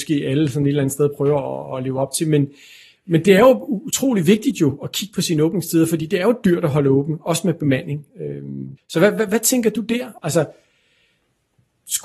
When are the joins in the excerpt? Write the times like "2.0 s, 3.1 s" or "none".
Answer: 8.8 s, 10.2 s